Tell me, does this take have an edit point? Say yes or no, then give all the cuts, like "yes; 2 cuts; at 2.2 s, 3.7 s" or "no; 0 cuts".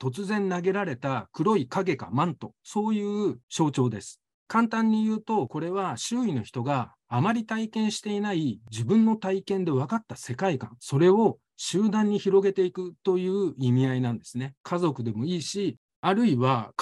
yes; 2 cuts; at 14.6 s, 15.9 s